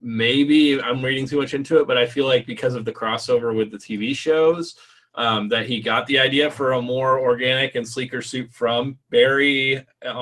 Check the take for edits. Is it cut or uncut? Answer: uncut